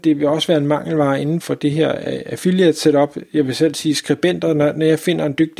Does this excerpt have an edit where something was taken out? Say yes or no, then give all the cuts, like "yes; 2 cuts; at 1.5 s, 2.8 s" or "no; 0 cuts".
yes; 1 cut; at 1.4 s